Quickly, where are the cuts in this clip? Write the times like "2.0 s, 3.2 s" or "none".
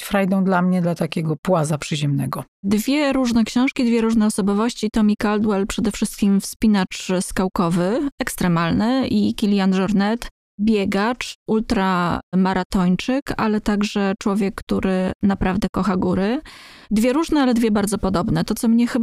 none